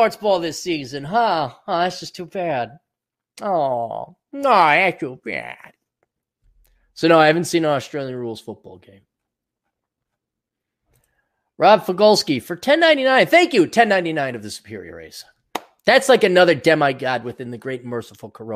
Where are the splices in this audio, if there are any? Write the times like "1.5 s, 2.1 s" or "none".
none

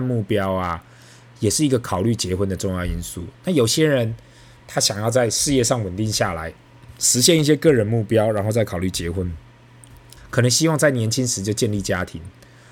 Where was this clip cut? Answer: 10.2 s

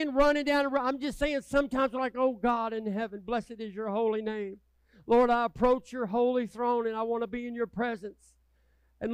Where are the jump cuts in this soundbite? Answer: none

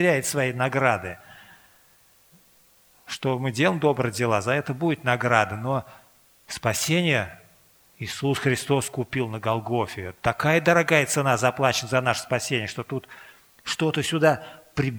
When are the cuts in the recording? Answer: none

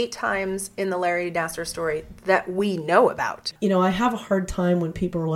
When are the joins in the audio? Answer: 3.5 s

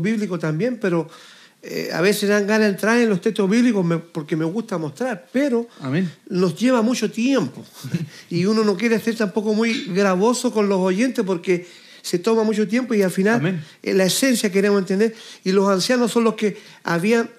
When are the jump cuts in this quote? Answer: none

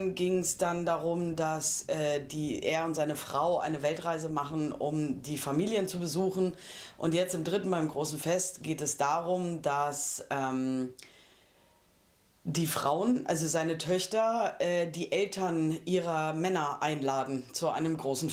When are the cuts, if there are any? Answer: none

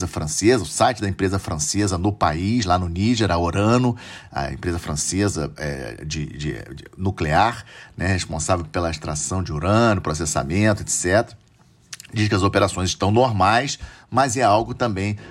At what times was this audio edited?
none

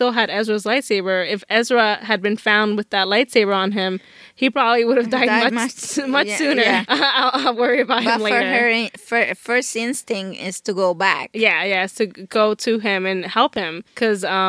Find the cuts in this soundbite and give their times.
6.8 s

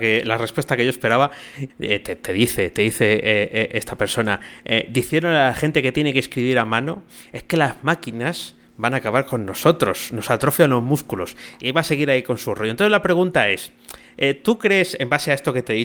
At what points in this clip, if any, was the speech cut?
1.7 s

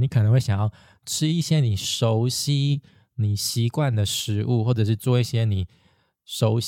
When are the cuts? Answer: none

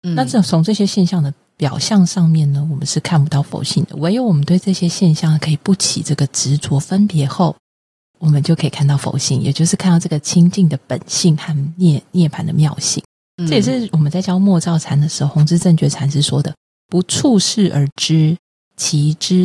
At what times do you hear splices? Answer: none

